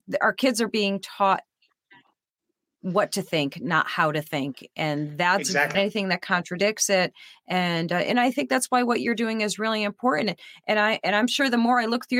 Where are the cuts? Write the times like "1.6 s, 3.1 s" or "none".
5.7 s